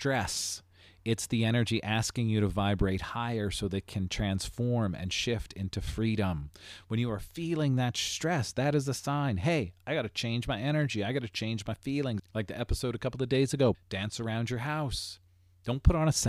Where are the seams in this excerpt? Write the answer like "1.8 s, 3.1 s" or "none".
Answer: 12.2 s, 13.7 s